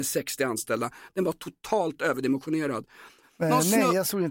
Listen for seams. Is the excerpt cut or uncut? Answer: cut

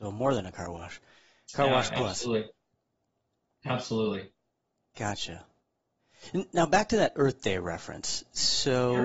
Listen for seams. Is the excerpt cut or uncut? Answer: uncut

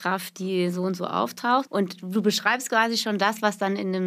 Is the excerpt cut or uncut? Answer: cut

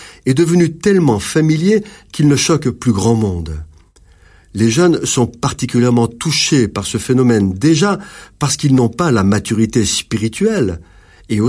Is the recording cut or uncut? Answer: uncut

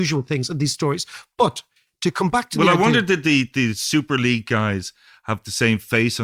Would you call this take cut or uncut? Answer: uncut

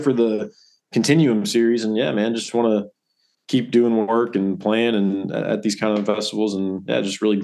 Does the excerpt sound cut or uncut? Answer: uncut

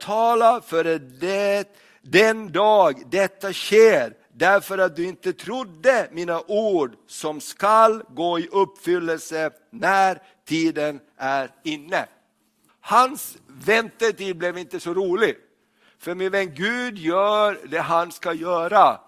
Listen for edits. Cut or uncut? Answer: cut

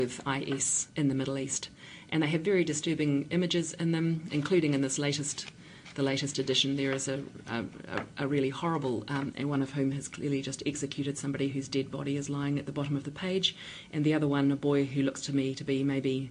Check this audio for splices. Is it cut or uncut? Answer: cut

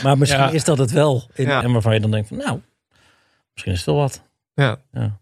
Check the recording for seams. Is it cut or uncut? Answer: cut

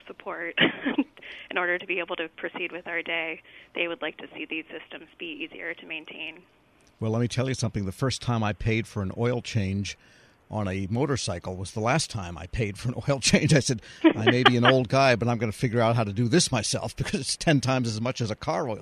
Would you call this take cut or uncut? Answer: uncut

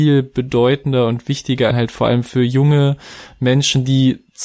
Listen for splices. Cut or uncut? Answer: cut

